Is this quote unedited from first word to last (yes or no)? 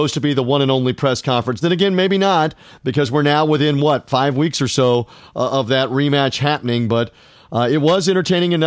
no